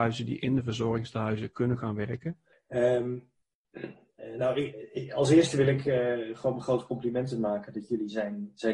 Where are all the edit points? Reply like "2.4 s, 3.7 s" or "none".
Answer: 2.5 s

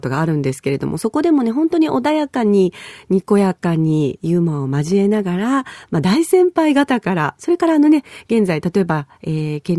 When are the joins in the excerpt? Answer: none

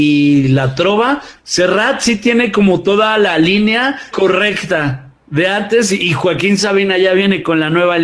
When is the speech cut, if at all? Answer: 1.4 s, 4.1 s

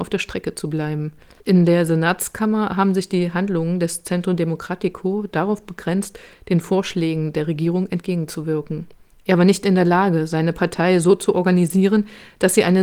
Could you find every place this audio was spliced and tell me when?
1.4 s, 9.1 s

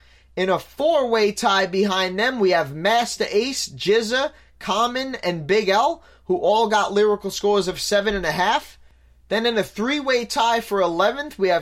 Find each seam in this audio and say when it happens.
none

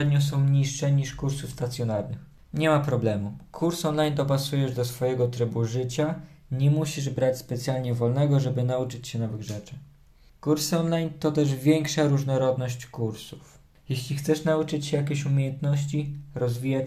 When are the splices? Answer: 2.4 s

